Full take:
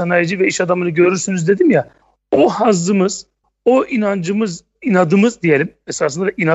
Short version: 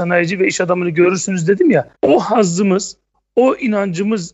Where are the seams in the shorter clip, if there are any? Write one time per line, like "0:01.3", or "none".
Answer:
0:01.9

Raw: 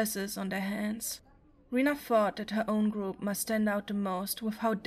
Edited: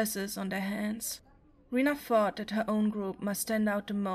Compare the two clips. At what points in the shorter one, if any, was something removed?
none

